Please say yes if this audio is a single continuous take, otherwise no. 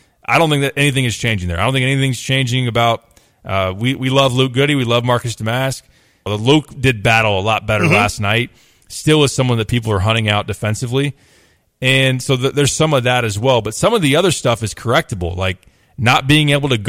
no